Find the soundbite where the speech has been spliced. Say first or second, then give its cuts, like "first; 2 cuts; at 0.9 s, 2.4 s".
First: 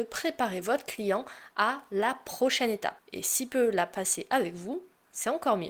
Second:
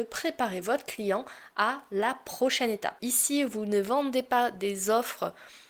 second; 1 cut; at 3.0 s